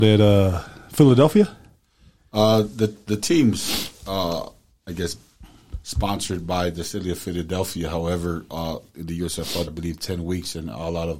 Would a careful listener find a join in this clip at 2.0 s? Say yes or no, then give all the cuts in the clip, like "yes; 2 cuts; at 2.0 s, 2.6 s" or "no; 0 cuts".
no; 1 cut; at 9.7 s